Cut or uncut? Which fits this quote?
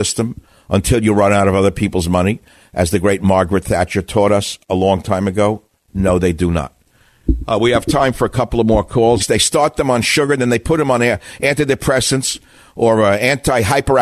cut